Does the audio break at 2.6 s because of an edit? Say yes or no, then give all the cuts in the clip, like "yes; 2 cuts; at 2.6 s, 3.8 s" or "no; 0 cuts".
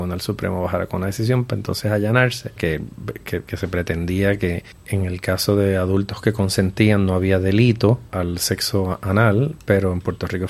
yes; 2 cuts; at 2.6 s, 8.1 s